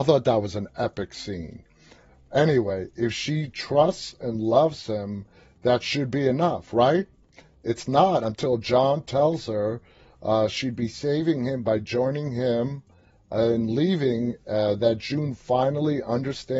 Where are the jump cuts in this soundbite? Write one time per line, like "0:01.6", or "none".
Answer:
none